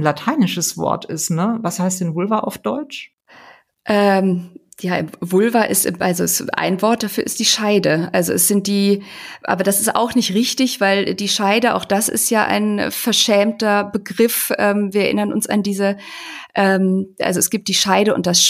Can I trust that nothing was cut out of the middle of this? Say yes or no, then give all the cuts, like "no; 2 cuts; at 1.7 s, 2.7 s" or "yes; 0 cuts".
yes; 0 cuts